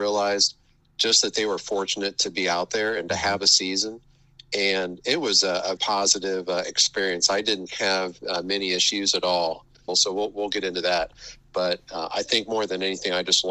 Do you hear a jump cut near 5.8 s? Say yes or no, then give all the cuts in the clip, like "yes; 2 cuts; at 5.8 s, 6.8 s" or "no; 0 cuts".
yes; 2 cuts; at 5.8 s, 9.9 s